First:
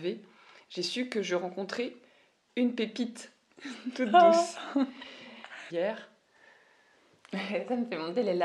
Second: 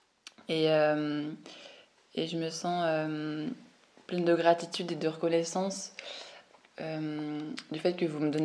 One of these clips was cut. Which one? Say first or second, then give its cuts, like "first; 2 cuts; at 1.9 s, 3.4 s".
first; 1 cut; at 5.7 s